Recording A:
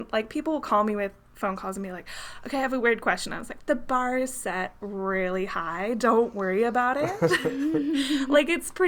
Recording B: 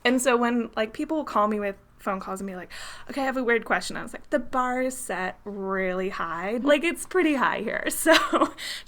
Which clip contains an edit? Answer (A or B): B